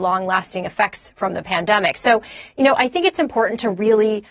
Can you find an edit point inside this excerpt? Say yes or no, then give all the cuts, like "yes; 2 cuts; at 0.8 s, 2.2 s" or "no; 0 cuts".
no; 0 cuts